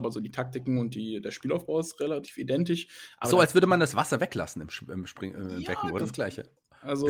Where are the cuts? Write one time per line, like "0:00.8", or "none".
0:06.0